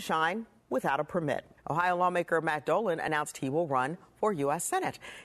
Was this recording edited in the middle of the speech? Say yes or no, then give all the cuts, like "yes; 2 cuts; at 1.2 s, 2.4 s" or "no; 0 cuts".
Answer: yes; 1 cut; at 1.6 s